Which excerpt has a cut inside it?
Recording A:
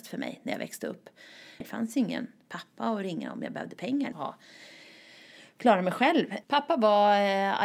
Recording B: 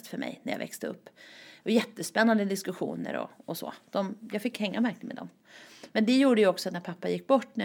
A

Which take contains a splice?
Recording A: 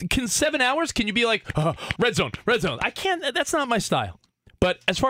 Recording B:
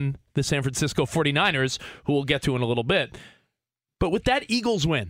A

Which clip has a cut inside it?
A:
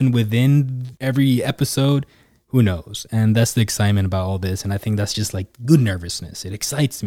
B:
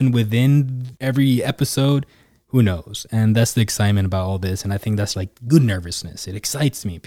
B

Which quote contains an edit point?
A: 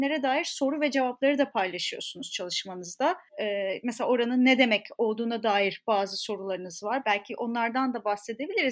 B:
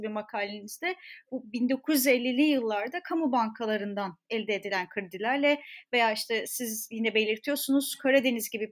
A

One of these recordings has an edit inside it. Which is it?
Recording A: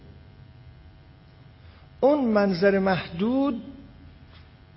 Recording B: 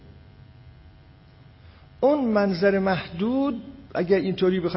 B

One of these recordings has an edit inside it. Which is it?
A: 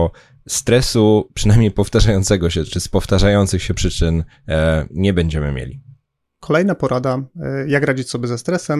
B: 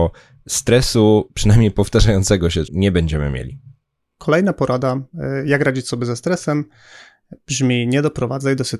B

